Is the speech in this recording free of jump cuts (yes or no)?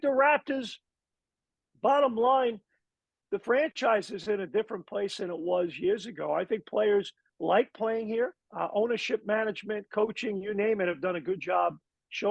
no